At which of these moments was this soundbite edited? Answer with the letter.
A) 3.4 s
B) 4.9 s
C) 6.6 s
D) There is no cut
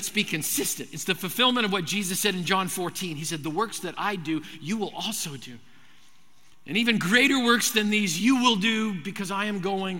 D